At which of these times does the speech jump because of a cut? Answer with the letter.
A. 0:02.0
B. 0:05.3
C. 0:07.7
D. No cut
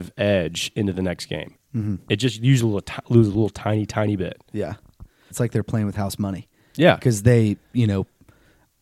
B